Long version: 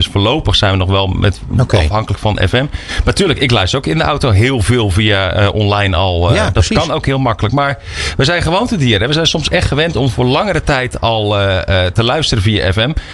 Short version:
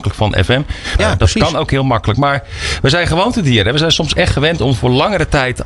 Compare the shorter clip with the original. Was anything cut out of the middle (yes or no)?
yes